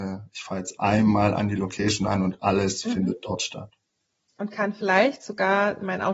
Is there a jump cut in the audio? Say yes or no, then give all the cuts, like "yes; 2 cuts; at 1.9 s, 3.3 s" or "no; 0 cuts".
no; 0 cuts